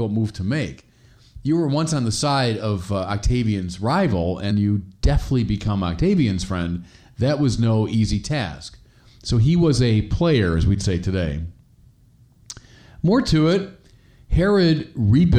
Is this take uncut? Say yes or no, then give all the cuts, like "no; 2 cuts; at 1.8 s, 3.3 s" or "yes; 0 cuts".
no; 1 cut; at 4.5 s